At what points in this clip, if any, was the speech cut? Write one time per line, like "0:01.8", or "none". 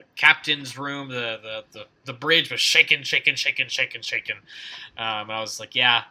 none